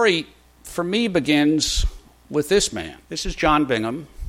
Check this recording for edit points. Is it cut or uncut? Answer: cut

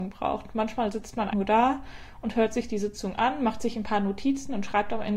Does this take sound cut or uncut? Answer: cut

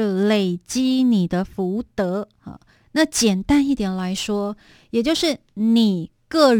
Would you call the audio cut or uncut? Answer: uncut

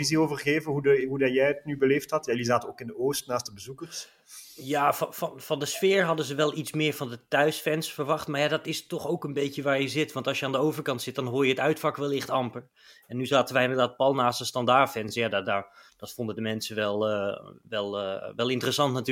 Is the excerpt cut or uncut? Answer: uncut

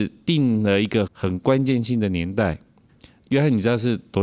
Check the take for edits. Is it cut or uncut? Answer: cut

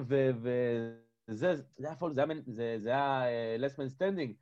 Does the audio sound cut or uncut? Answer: uncut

